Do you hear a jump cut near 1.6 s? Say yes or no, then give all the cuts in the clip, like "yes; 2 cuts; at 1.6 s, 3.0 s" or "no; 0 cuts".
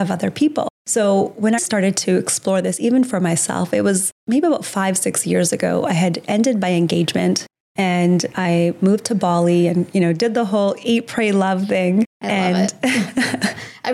yes; 1 cut; at 1.6 s